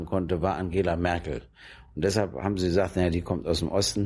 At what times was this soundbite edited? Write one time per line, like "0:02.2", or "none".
none